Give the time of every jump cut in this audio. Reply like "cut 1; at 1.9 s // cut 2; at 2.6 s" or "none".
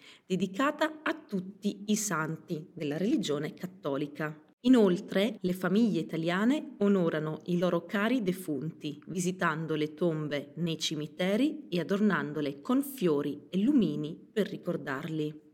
cut 1; at 5.4 s